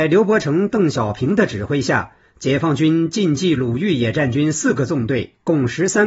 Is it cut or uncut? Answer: uncut